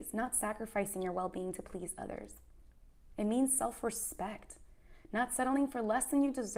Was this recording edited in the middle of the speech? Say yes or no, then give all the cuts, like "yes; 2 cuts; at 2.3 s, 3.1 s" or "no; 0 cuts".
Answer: no; 0 cuts